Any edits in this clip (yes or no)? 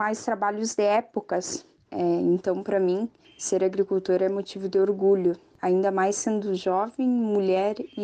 yes